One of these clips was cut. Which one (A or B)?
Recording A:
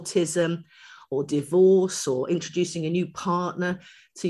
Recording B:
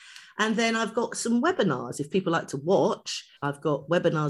B